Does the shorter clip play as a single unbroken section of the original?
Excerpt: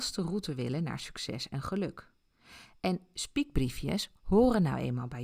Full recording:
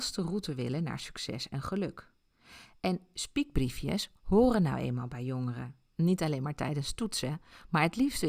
yes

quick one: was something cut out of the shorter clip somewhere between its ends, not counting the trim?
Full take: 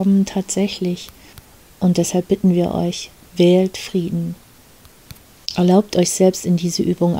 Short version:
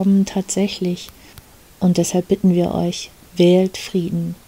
no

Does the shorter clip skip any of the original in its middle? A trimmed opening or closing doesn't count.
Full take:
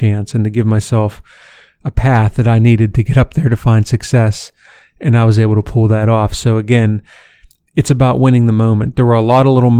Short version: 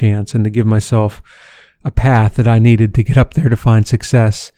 no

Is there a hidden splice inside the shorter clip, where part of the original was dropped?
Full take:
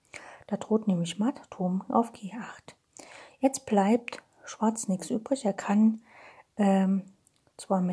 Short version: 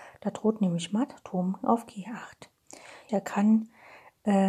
yes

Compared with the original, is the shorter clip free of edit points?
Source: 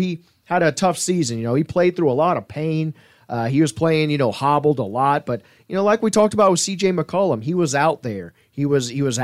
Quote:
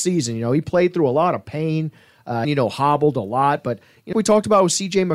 no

